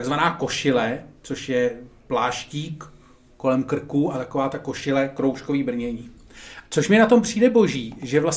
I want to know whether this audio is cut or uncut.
cut